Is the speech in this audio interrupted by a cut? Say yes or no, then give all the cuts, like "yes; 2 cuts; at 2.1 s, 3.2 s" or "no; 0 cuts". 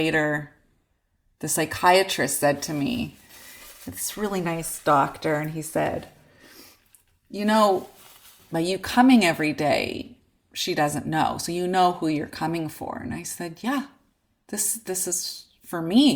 no; 0 cuts